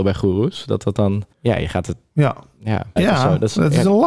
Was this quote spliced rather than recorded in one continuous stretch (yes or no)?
yes